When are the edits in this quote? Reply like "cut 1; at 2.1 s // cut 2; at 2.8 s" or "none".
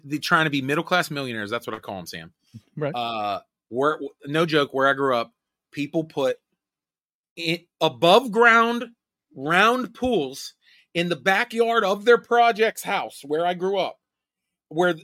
none